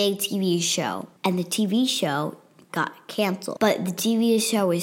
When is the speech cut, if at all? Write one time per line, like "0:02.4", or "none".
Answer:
0:01.2